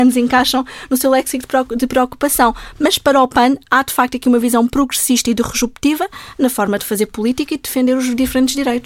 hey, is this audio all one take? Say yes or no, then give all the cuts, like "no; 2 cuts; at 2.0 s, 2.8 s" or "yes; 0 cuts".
yes; 0 cuts